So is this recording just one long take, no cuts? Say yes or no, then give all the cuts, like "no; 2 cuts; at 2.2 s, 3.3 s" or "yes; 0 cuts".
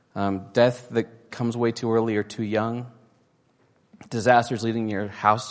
yes; 0 cuts